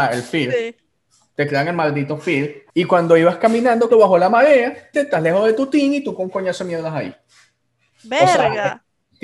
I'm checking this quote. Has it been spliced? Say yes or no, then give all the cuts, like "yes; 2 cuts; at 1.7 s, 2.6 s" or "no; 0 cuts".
yes; 3 cuts; at 2.7 s, 3.9 s, 4.9 s